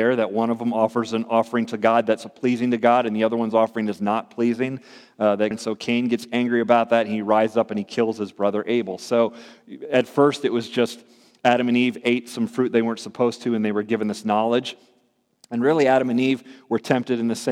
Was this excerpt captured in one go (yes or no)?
no